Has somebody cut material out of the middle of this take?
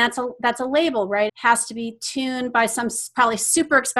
yes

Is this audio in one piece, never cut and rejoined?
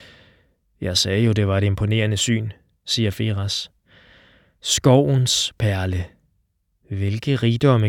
yes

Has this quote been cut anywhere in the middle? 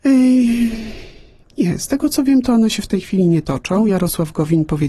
no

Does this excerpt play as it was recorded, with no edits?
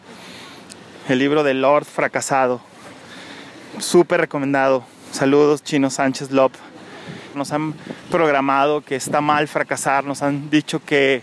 no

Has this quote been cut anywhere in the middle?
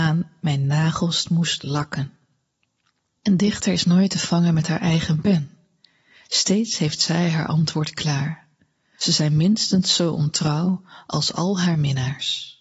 yes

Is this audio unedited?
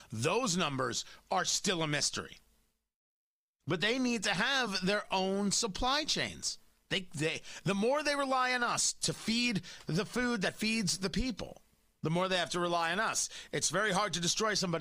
yes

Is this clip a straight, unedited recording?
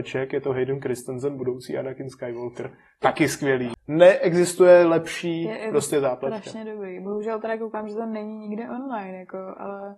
no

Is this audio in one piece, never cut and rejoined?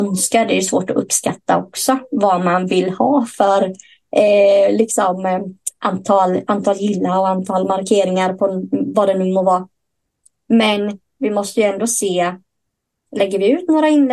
yes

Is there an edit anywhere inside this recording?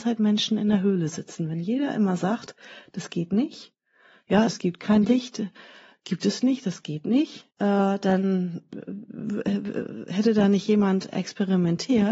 yes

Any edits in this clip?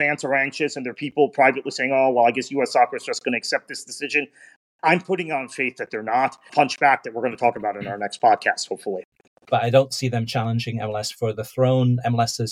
yes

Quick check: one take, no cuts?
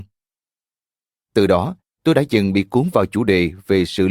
yes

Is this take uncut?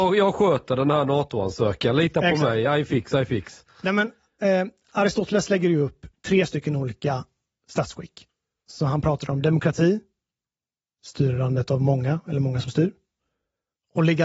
yes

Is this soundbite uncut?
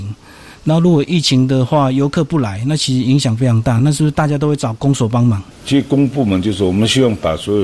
yes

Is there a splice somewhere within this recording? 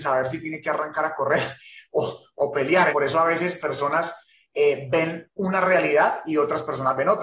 yes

